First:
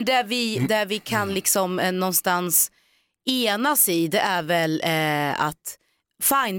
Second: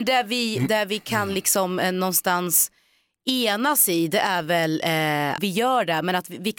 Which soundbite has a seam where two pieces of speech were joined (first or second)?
second